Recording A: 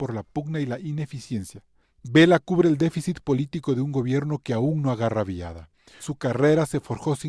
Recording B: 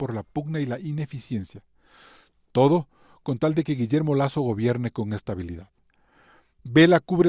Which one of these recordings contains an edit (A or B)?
A